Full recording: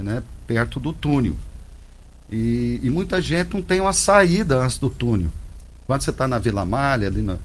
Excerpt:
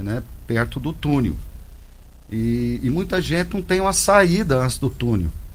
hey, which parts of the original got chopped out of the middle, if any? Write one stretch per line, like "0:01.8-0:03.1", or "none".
none